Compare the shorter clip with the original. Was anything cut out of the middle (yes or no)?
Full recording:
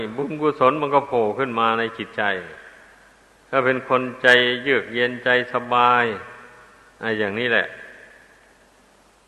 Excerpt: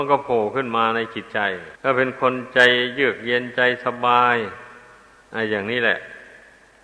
yes